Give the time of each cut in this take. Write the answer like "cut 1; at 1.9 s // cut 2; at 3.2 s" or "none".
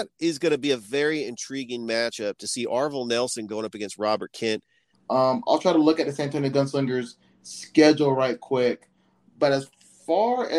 cut 1; at 4.9 s